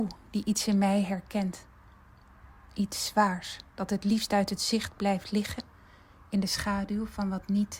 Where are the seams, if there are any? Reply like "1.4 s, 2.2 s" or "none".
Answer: none